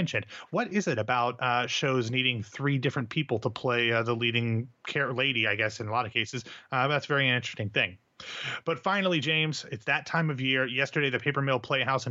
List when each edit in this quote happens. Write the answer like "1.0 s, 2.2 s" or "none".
none